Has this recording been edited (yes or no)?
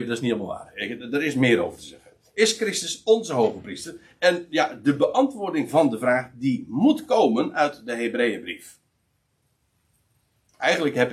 no